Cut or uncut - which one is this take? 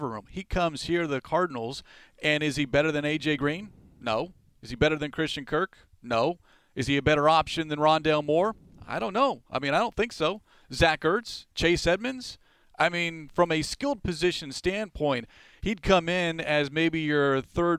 uncut